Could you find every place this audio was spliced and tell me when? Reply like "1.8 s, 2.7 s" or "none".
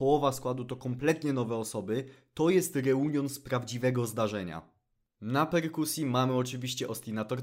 none

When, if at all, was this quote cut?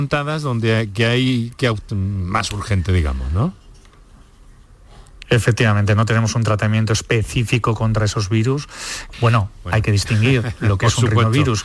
1.9 s, 9.1 s

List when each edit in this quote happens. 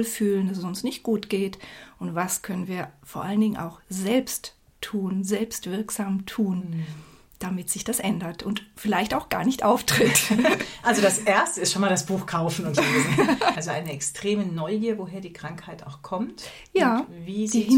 13.6 s

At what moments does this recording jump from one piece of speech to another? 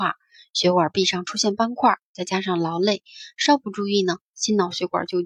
none

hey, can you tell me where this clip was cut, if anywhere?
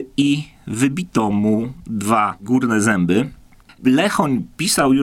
3.7 s

